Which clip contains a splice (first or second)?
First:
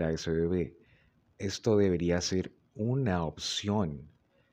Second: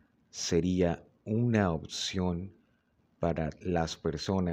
first